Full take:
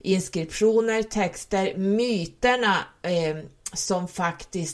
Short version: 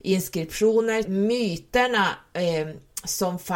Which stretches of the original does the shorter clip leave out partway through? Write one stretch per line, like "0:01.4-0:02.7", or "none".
0:01.0-0:01.7